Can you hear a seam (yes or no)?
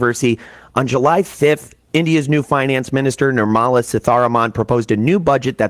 no